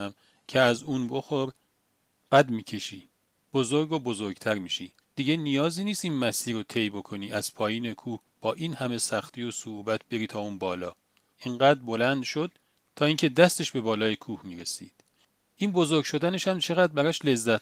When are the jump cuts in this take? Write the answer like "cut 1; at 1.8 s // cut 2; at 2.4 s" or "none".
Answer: cut 1; at 5.0 s // cut 2; at 11.3 s